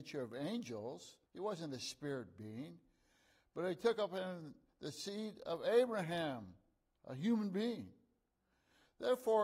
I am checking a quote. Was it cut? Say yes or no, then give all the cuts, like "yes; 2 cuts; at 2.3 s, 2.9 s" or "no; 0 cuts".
yes; 1 cut; at 1.3 s